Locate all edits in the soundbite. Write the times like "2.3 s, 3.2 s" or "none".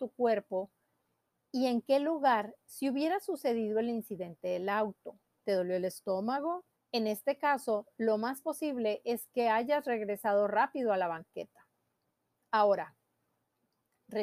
6.7 s